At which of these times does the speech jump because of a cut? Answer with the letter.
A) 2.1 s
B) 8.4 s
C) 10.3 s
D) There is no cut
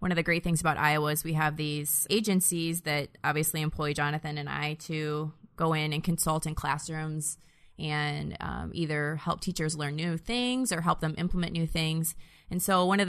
A